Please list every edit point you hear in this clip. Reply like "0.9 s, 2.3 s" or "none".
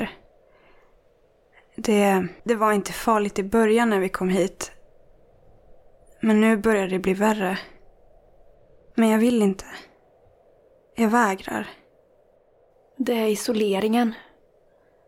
2.4 s, 8.9 s